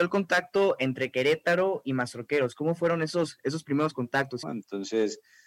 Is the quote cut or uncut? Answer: cut